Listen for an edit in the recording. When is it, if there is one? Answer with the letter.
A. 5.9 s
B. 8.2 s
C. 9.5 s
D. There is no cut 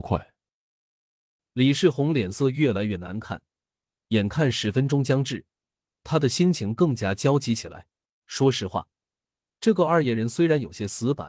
B